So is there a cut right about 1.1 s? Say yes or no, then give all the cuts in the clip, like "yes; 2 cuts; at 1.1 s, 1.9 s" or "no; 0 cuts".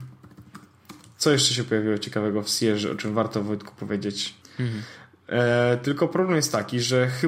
no; 1 cut; at 4.4 s